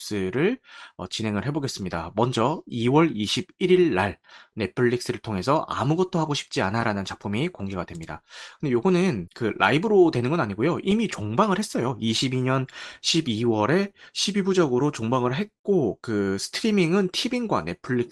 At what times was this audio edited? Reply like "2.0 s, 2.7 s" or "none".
none